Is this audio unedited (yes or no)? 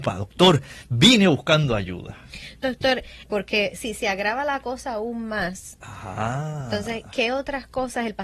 no